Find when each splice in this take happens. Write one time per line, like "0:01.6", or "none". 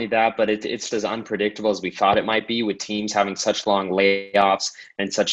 0:00.9